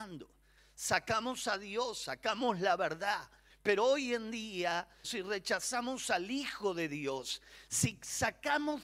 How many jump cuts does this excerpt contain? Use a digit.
2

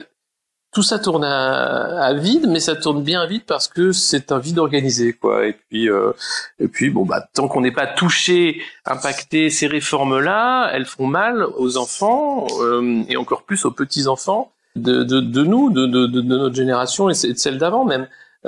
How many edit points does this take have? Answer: 2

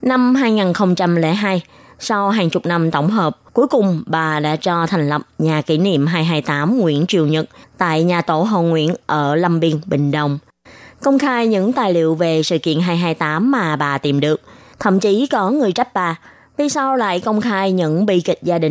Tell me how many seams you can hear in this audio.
2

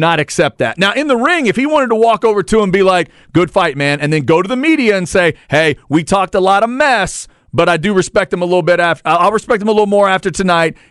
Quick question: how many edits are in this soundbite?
0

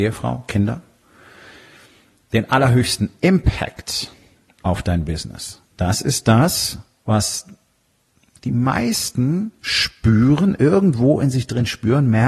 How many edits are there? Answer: 0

